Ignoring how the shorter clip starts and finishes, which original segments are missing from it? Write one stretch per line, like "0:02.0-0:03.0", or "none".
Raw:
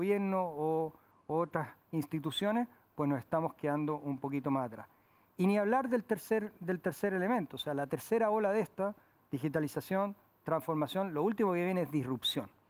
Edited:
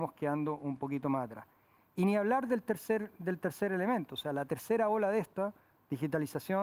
none